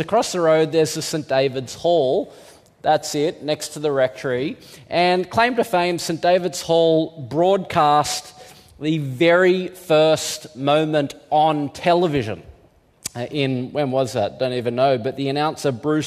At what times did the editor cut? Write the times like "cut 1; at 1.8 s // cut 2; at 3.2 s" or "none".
none

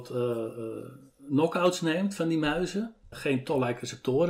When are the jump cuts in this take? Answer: cut 1; at 3.1 s

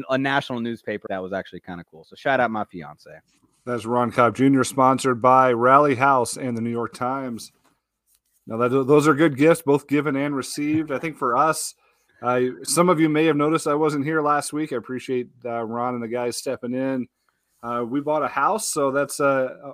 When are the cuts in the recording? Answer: cut 1; at 1.1 s

